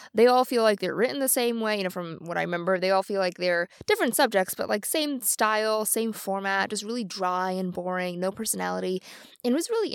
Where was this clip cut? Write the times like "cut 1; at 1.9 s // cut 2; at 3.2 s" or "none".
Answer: none